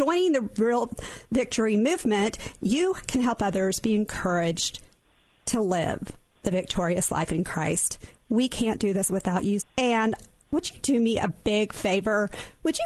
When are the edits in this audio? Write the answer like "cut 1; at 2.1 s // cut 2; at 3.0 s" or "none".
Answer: cut 1; at 9.6 s